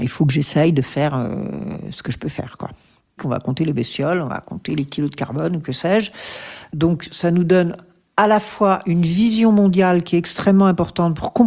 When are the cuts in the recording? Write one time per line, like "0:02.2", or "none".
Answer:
0:03.2
0:06.7